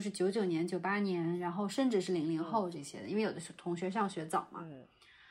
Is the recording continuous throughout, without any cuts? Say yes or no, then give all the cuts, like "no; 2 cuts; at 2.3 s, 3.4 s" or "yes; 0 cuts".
yes; 0 cuts